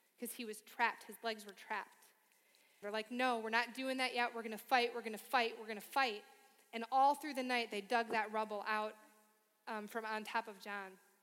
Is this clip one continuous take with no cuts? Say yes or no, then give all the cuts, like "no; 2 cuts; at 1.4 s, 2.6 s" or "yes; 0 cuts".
no; 1 cut; at 2.8 s